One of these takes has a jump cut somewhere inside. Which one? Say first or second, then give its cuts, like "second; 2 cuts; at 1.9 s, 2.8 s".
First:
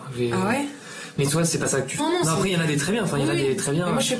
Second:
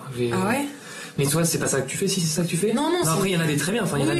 first; 1 cut; at 2.0 s